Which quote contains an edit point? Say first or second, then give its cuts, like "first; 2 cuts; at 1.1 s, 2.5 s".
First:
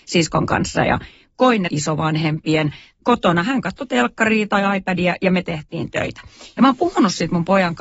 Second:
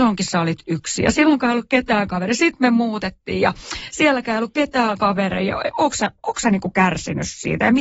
first; 3 cuts; at 1.7 s, 3.0 s, 6.5 s